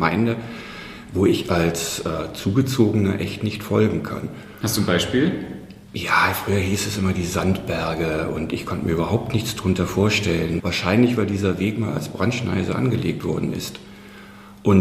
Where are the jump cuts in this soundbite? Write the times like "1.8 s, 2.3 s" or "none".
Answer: 5.9 s, 10.6 s